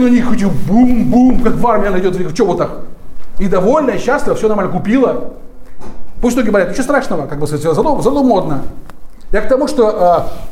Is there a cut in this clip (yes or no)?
no